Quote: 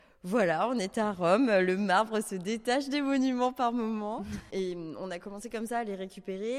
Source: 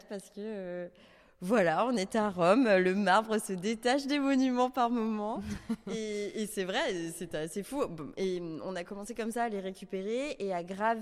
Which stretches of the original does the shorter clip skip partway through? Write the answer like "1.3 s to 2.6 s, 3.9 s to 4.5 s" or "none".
5.7 s to 8.1 s